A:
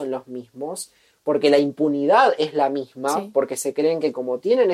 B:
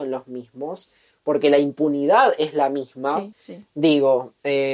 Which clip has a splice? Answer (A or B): B